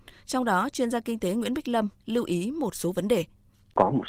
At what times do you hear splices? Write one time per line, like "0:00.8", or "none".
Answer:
0:02.0